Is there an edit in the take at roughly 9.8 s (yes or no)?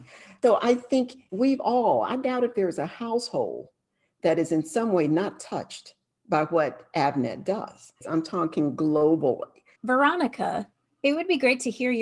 yes